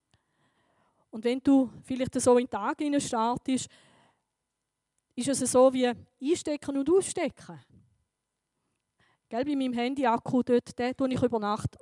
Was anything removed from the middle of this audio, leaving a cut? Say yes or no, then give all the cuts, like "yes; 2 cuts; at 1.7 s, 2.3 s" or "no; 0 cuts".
no; 0 cuts